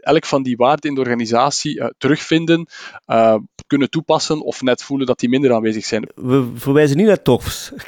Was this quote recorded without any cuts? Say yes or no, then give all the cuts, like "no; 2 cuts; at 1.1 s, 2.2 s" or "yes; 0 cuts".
no; 1 cut; at 6.1 s